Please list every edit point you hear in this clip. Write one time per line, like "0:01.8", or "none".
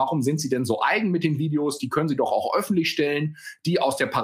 none